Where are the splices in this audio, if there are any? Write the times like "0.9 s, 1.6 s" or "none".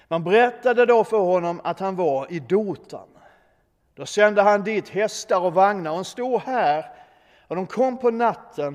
none